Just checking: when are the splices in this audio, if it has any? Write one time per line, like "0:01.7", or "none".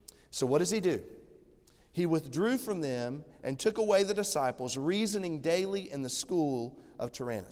none